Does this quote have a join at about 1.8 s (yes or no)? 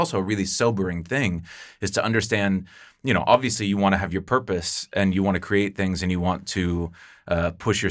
no